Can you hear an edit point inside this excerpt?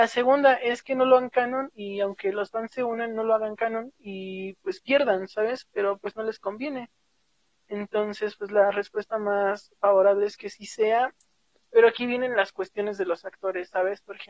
no; 0 cuts

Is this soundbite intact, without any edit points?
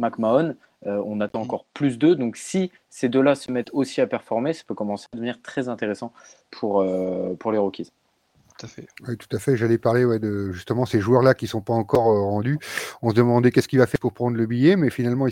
no; 1 cut; at 9.0 s

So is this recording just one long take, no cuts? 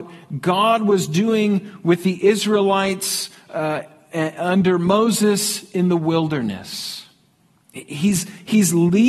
yes; 0 cuts

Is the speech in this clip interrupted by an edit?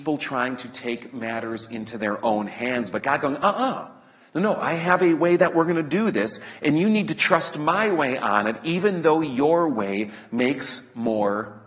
no; 0 cuts

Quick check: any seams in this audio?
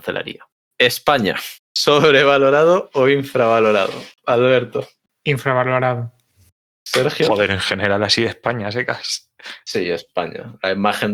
no; 0 cuts

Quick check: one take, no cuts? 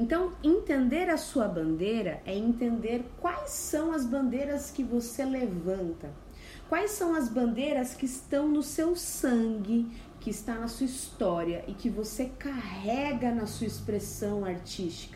no; 1 cut; at 10.1 s

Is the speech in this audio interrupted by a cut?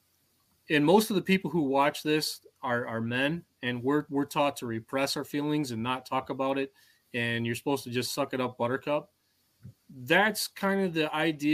yes; 1 cut; at 9.8 s

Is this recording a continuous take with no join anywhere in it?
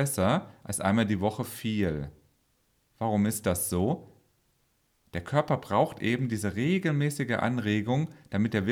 yes; 0 cuts

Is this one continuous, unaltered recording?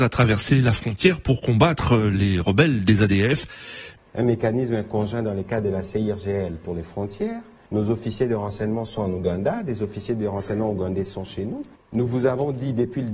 no; 3 cuts; at 4.0 s, 7.7 s, 11.8 s

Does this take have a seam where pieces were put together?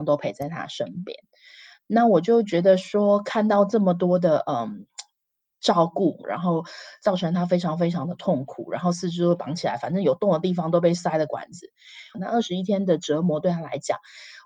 yes; 2 cuts; at 6.2 s, 12.1 s

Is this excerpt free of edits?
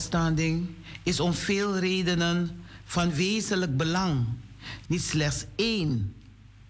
no; 1 cut; at 4.9 s

